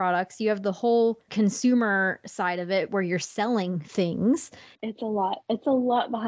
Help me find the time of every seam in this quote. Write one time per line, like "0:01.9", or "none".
0:01.3
0:04.7